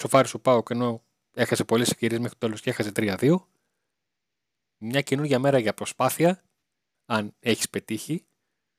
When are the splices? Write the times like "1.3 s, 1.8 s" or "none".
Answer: 4.6 s, 6.9 s